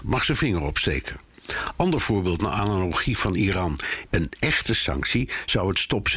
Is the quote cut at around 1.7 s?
no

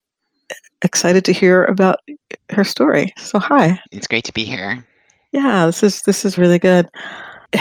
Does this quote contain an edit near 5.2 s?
no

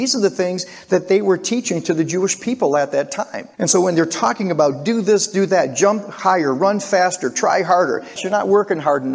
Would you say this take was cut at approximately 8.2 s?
yes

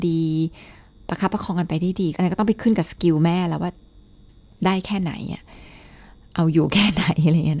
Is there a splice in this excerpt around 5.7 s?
no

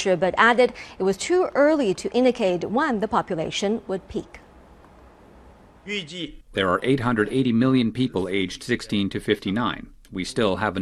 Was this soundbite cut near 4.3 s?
no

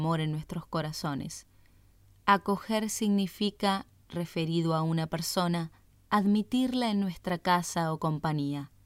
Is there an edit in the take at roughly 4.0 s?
no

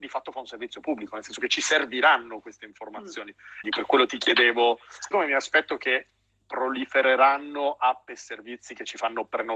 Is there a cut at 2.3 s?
no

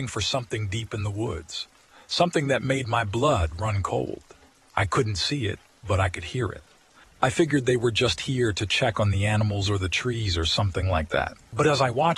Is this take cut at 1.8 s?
no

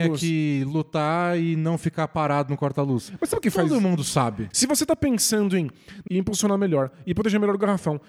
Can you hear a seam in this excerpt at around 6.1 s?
yes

